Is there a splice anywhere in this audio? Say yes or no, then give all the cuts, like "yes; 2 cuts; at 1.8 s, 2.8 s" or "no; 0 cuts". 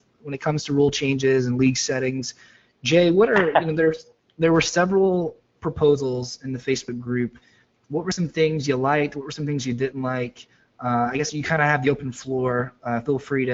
no; 0 cuts